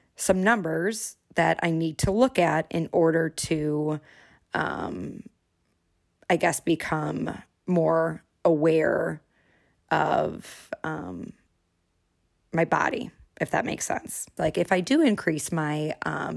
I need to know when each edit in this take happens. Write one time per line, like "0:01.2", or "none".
0:14.4